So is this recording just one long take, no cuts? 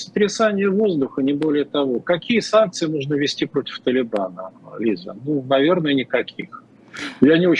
yes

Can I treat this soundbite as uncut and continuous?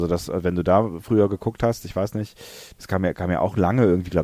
yes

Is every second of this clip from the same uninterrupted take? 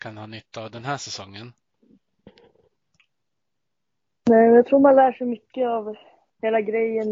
yes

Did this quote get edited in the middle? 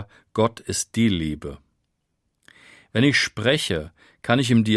no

